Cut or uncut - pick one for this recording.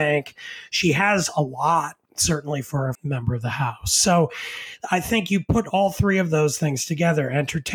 cut